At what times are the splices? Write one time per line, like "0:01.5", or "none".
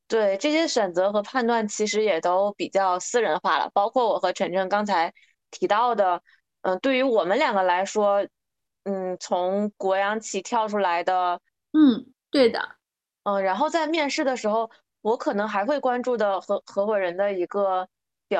0:11.6